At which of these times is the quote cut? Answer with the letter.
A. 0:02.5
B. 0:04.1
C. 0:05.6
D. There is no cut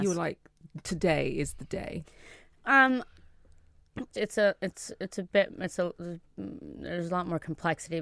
B